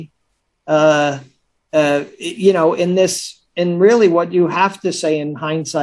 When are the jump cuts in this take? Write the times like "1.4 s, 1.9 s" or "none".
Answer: none